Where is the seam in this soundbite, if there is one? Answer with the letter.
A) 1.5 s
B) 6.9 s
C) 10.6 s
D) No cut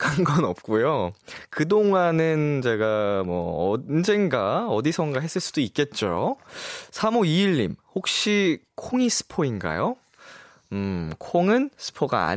D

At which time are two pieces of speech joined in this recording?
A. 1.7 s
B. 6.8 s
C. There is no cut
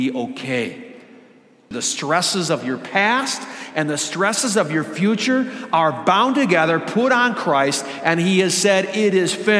A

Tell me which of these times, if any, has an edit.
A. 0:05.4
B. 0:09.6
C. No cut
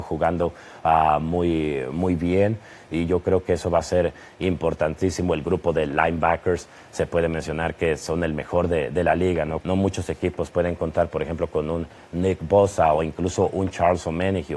B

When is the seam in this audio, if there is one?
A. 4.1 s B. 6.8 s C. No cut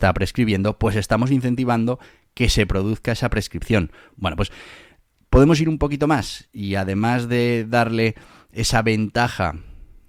A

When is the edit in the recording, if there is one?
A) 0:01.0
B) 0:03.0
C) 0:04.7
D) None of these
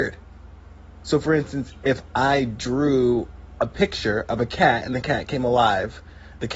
A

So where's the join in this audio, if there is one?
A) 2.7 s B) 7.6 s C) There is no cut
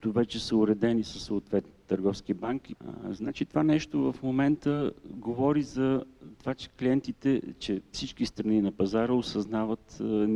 A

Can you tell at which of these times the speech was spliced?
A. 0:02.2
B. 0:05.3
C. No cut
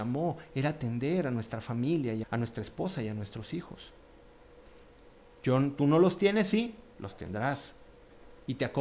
A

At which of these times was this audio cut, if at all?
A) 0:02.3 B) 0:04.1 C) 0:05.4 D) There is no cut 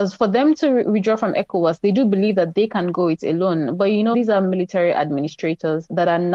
B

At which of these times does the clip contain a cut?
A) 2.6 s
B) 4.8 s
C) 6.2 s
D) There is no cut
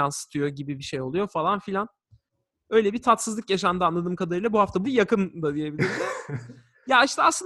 B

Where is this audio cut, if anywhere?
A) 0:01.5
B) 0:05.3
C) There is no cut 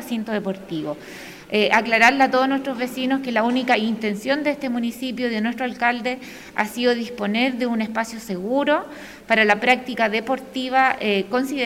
C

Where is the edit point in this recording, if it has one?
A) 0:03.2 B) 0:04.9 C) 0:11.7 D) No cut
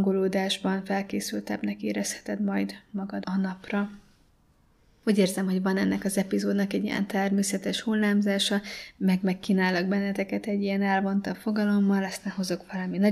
A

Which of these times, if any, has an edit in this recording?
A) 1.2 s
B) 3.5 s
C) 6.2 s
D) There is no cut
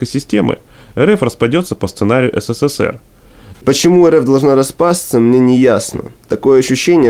B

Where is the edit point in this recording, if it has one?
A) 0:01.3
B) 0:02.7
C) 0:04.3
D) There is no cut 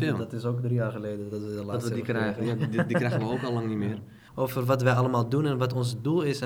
C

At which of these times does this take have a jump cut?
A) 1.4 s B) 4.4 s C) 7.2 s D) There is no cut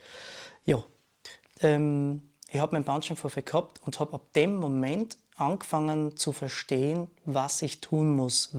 A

